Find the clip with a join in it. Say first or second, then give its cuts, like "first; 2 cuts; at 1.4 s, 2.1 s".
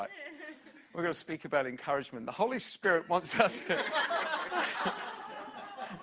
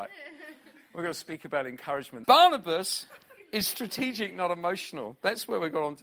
second; 1 cut; at 2.2 s